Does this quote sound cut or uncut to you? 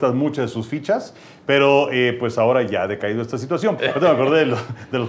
cut